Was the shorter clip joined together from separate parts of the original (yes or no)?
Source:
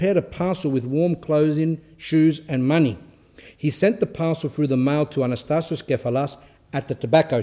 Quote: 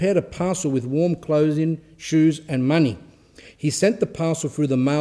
no